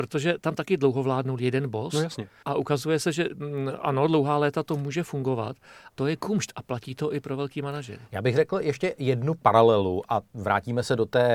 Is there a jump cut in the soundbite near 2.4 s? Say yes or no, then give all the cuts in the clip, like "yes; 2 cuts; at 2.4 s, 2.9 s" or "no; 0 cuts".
yes; 2 cuts; at 2.4 s, 5.9 s